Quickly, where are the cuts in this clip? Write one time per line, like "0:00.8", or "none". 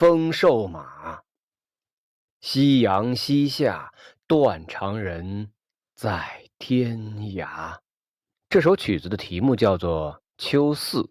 0:08.3